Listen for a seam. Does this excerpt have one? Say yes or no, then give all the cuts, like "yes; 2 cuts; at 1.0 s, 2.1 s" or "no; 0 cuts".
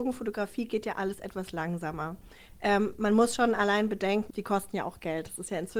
yes; 1 cut; at 4.3 s